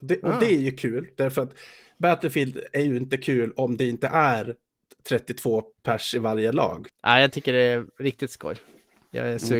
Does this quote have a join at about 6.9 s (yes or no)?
yes